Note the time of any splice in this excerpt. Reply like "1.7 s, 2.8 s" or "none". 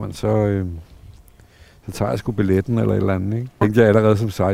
3.6 s